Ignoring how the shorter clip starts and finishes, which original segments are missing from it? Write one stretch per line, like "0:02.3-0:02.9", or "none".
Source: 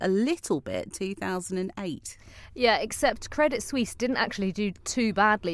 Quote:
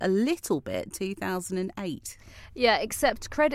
none